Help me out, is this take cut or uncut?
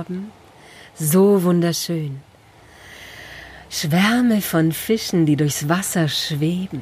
uncut